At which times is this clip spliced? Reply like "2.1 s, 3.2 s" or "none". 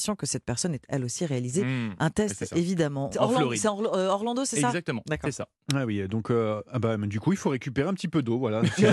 3.1 s